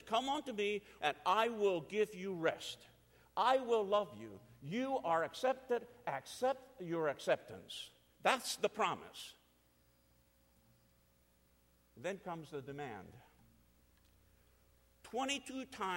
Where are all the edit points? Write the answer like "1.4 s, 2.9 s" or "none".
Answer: 1.0 s